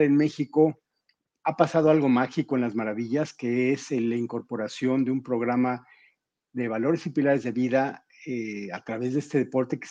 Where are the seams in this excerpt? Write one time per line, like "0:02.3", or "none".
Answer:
none